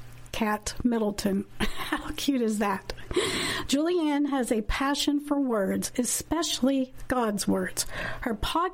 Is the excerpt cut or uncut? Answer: uncut